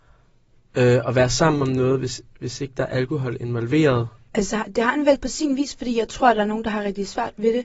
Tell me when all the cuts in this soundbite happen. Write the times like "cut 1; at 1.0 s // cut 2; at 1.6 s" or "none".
cut 1; at 4.3 s